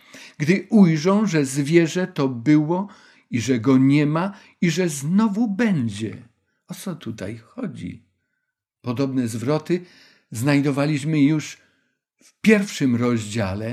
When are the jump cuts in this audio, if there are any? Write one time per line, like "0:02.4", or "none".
none